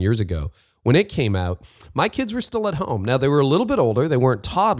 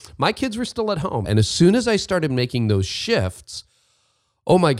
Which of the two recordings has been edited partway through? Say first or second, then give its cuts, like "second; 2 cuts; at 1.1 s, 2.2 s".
second; 1 cut; at 1.2 s